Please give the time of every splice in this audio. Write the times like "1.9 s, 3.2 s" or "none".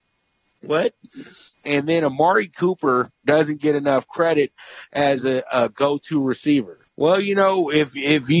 1.5 s, 6.9 s